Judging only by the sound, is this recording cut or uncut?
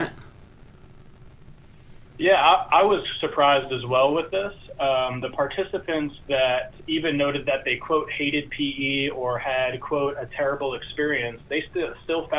uncut